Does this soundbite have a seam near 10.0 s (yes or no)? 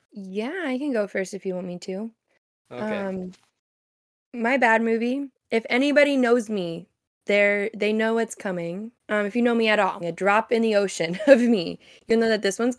yes